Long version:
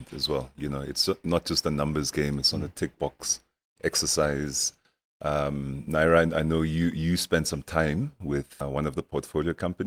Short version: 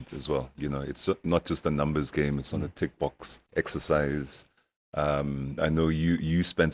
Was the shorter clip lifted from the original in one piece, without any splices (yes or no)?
no